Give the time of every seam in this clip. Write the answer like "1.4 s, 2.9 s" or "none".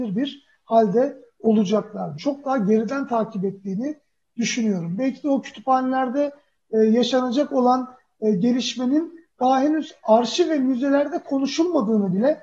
2.2 s